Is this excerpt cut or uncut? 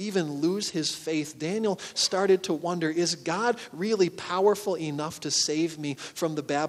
uncut